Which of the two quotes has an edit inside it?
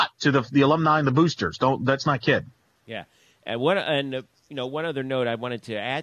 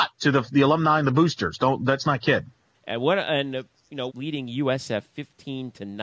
second; 2 cuts; at 2.7 s, 4.1 s

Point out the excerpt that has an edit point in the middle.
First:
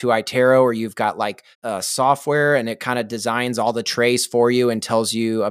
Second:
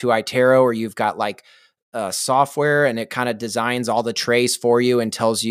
first; 1 cut; at 1.5 s

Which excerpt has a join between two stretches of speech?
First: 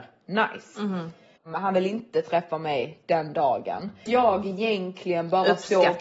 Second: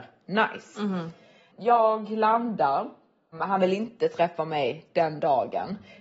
first; 2 cuts; at 1.4 s, 4.1 s

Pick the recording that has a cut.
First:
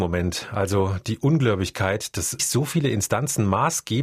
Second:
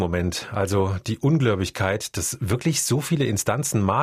first; 1 cut; at 2.4 s

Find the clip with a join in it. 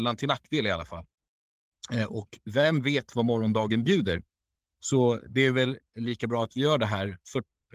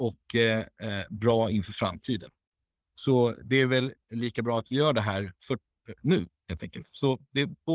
second; 2 cuts; at 2.8 s, 6.0 s

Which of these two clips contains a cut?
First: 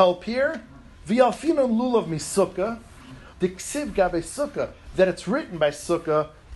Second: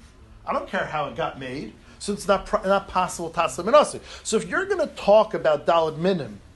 first; 1 cut; at 3.3 s

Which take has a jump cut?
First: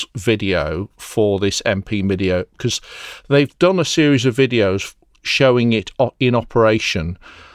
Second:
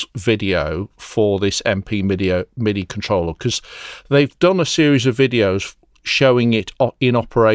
first; 1 cut; at 2.5 s

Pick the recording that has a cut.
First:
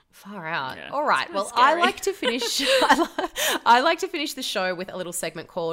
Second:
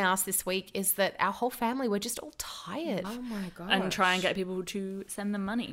second; 1 cut; at 3.0 s

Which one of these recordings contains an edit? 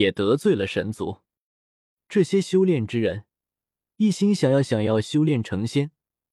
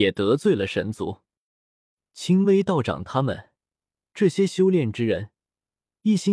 first; 1 cut; at 2.0 s

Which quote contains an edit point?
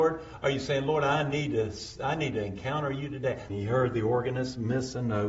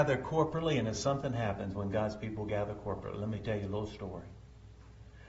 first; 1 cut; at 3.5 s

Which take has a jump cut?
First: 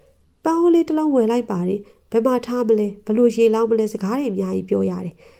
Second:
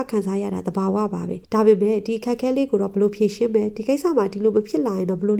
second; 1 cut; at 1.4 s

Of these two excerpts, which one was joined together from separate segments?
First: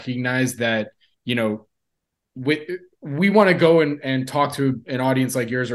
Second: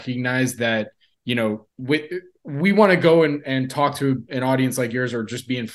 second; 1 cut; at 1.7 s

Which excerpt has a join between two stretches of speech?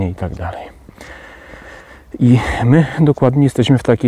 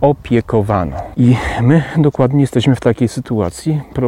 second; 1 cut; at 1.1 s

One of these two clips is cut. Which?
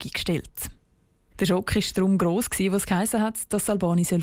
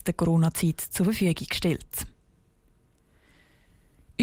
first; 1 cut; at 1.3 s

